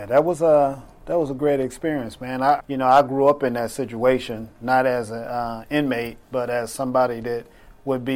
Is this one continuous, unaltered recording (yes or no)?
no